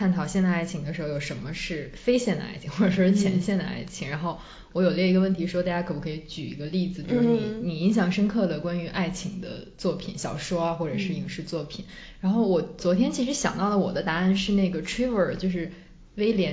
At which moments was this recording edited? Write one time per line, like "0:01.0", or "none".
none